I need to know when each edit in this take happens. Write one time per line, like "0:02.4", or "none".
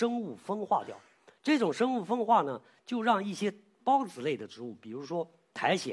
0:03.8